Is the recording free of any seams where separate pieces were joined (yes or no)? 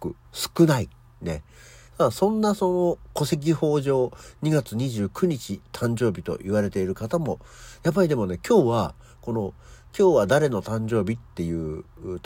no